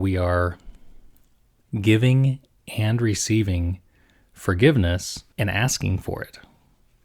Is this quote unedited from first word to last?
no; 1 cut; at 5.3 s

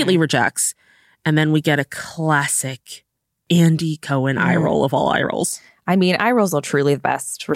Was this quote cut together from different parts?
no; 0 cuts

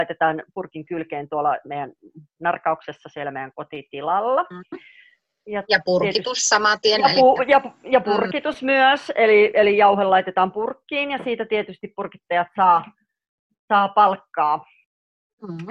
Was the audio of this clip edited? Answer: yes; 1 cut; at 5.6 s

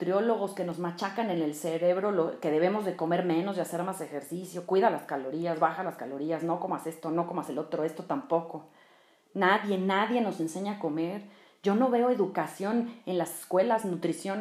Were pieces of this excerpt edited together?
no; 0 cuts

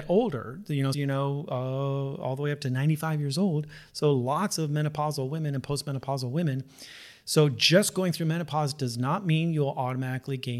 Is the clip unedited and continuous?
no; 1 cut; at 0.9 s

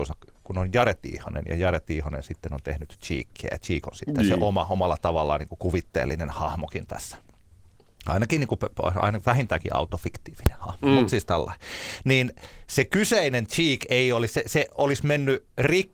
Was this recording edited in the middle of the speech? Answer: no; 0 cuts

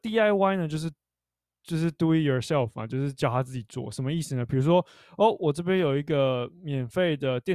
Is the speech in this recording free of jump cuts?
yes; 0 cuts

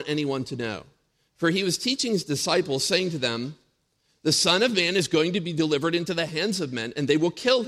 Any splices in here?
no; 0 cuts

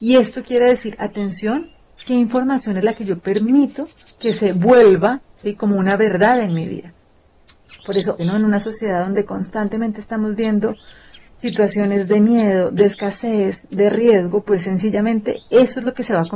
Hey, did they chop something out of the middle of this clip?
yes; 1 cut; at 8.2 s

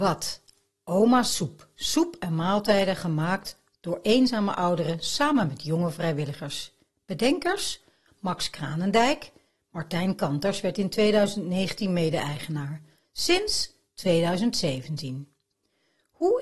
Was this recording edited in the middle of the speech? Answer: no; 0 cuts

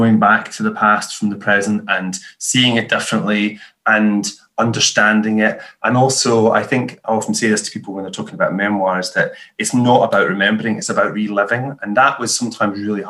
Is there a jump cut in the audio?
no; 0 cuts

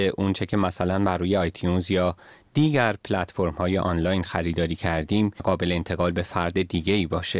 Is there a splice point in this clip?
no; 0 cuts

